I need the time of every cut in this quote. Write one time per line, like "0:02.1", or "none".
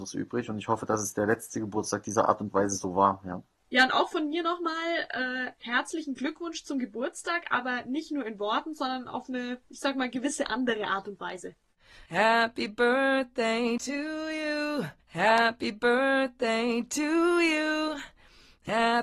0:15.0